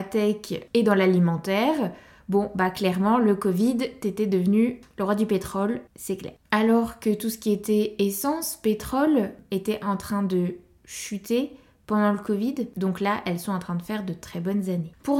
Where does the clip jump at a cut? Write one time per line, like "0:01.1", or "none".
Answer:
0:06.4
0:12.7